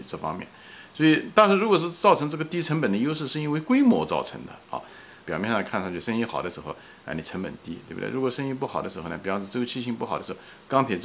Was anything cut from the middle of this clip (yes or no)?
yes